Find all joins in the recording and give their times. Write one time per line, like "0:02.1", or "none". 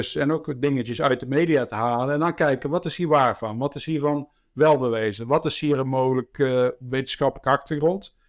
none